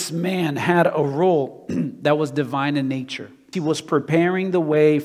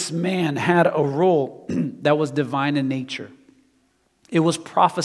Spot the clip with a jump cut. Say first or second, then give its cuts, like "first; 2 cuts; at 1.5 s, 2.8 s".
first; 1 cut; at 3.5 s